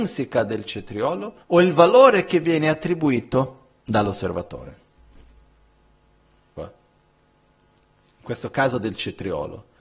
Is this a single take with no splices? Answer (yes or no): no